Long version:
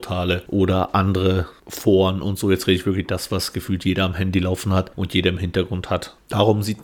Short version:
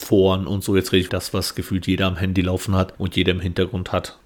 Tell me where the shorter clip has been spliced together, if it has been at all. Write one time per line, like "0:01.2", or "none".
0:01.1